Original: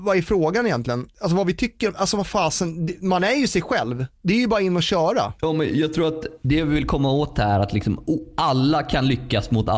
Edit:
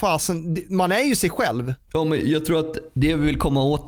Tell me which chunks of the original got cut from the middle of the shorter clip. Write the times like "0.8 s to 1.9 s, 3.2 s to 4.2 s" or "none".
4.2 s to 5.4 s